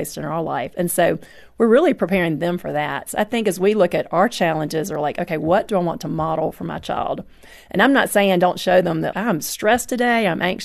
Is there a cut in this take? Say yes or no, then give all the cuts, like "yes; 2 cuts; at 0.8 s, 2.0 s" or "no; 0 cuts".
yes; 1 cut; at 9.1 s